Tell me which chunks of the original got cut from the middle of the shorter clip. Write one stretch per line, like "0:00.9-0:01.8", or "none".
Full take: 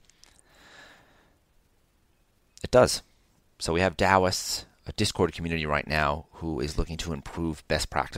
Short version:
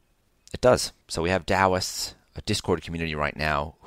0:03.1-0:03.5